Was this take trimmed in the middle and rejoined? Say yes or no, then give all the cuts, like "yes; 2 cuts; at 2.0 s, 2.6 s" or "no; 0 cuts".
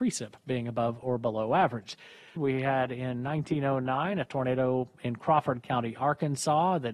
yes; 1 cut; at 2.4 s